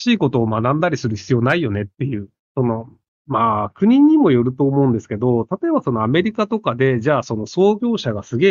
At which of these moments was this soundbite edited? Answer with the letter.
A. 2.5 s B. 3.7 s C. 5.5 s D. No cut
A